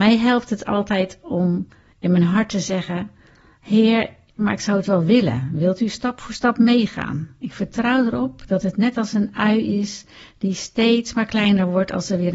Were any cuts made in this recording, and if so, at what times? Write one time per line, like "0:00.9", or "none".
0:04.4